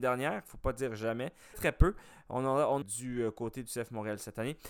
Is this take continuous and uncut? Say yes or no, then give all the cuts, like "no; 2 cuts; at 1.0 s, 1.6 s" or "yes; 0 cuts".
no; 2 cuts; at 1.5 s, 2.8 s